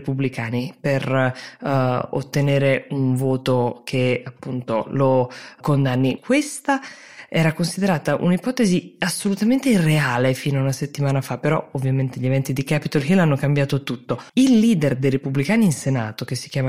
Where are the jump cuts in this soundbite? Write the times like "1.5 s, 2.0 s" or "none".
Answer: 6.2 s, 14.3 s

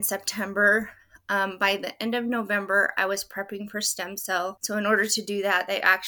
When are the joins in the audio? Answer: none

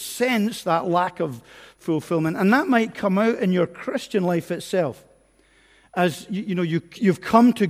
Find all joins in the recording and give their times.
none

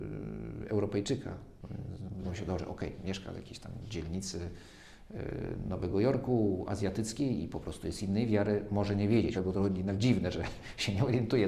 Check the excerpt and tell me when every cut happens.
2.2 s, 9.3 s

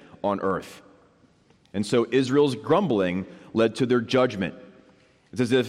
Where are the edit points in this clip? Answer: none

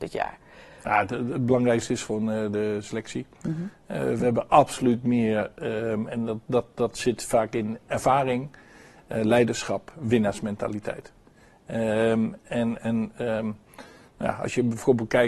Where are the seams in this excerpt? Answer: none

